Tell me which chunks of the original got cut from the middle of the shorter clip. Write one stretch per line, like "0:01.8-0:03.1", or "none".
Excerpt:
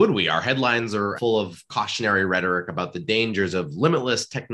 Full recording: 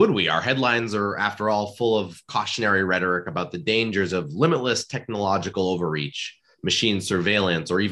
0:01.2-0:01.7

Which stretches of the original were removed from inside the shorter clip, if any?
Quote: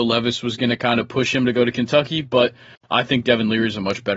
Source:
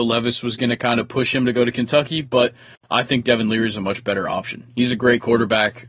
none

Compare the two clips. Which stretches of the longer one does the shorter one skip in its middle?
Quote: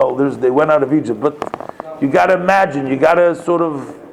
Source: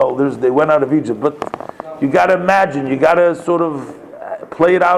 none

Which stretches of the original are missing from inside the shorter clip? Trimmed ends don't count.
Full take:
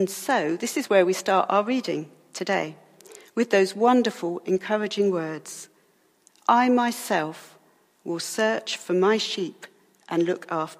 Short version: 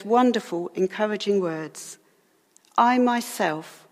none

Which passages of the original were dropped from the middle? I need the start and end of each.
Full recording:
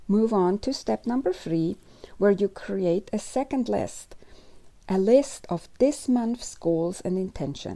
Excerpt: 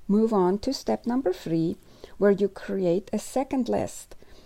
none

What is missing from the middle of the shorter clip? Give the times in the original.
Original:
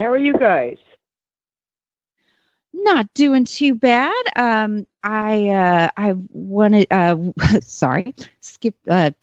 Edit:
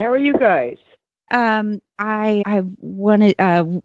0:01.3-0:04.3
0:05.5-0:05.9

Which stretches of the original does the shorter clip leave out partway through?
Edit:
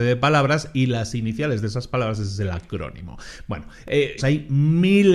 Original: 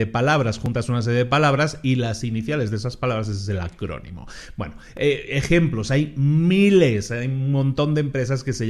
0:05.3-0:05.8

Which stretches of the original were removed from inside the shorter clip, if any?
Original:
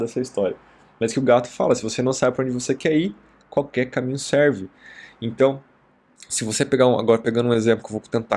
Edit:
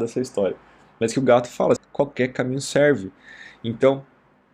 0:01.8-0:03.3

